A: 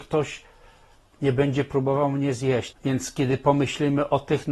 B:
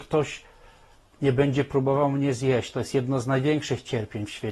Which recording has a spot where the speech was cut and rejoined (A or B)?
A